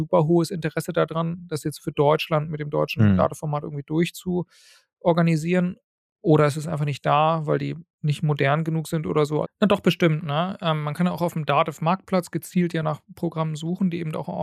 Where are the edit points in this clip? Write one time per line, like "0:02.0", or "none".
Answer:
0:09.4

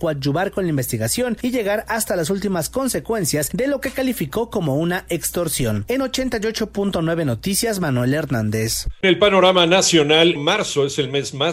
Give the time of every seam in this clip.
0:10.4

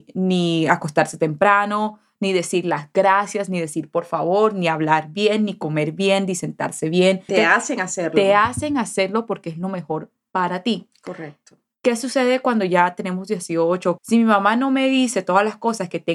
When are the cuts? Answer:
0:07.3
0:14.0

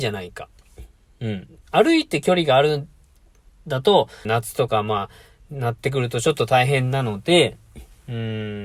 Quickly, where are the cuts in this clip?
0:01.6
0:04.3

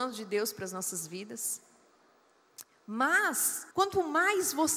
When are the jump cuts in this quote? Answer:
0:03.7

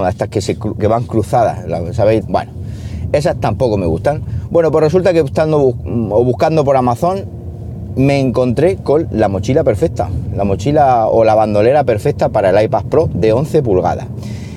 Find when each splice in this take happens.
0:02.2

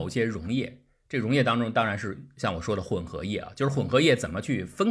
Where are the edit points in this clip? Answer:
none

